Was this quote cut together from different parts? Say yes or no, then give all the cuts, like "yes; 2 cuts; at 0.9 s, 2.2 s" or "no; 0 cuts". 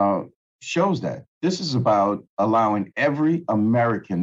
yes; 1 cut; at 1.3 s